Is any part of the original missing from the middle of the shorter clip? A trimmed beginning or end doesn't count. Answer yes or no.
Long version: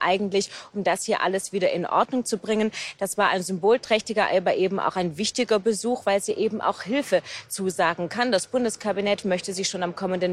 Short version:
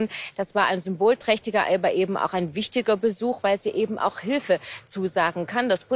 no